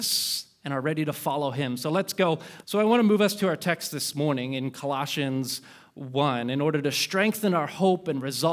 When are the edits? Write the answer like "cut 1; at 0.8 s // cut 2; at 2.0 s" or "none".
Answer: cut 1; at 2.6 s